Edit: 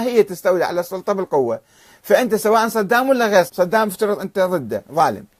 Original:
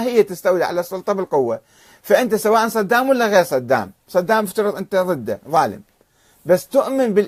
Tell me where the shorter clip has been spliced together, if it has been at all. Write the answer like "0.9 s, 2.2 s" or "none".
3.5 s